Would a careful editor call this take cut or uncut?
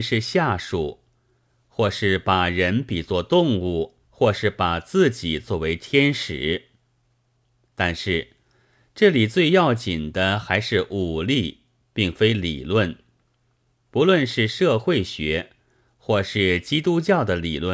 cut